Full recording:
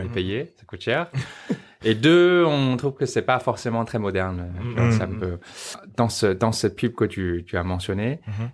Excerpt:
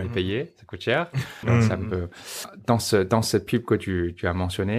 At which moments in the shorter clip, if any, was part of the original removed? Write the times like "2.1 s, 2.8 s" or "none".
1.4 s